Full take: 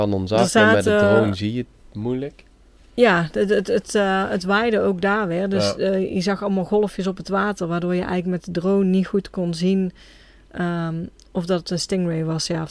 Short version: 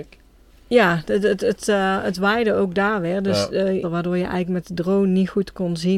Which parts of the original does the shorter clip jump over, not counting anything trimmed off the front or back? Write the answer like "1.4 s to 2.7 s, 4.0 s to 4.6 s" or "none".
6.1 s to 7.6 s